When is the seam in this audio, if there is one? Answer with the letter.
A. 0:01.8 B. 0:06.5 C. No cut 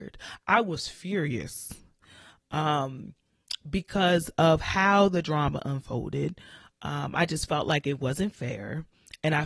C